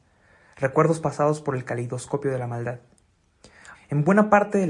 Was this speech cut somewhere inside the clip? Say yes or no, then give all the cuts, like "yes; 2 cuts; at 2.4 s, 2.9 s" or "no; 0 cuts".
yes; 1 cut; at 3.7 s